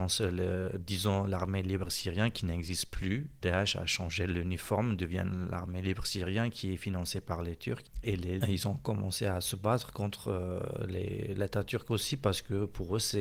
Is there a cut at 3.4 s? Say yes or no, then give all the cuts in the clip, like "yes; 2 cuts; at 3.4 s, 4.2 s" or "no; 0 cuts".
yes; 2 cuts; at 3.4 s, 8.4 s